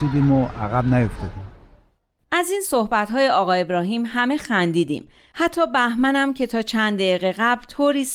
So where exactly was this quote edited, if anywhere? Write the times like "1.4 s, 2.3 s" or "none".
none